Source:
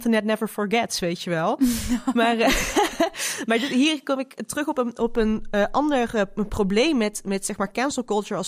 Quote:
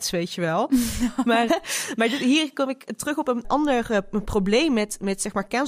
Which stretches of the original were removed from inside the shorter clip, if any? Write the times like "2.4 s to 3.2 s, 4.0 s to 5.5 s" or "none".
2.4 s to 3.0 s, 4.9 s to 5.7 s